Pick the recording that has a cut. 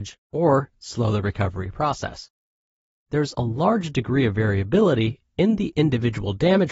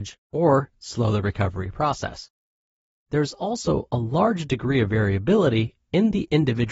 first; 1 cut; at 3.3 s

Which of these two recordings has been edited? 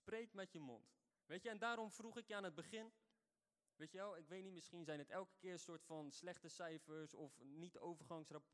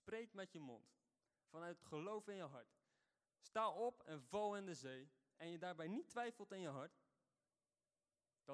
first; 2 cuts; at 1.1 s, 3.7 s

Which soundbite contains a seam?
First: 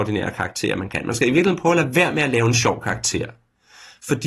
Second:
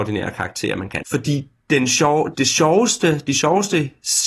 second; 2 cuts; at 1.0 s, 2.3 s

